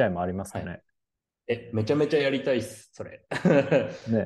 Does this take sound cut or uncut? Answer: uncut